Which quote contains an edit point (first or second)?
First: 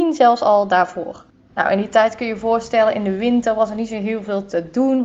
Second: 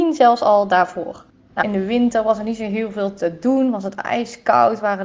second